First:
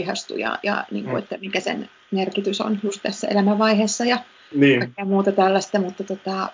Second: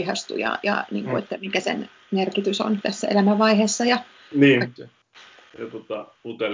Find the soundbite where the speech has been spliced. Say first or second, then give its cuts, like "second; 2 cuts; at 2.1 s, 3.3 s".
second; 2 cuts; at 2.8 s, 4.8 s